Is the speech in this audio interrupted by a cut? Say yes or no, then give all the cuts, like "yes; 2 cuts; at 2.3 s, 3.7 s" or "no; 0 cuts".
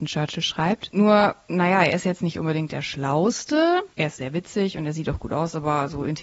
yes; 1 cut; at 0.9 s